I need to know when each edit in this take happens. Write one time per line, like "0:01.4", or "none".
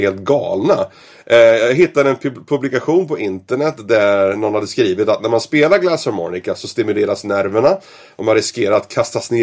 none